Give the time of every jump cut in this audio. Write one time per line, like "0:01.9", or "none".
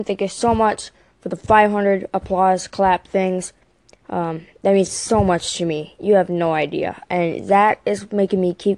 none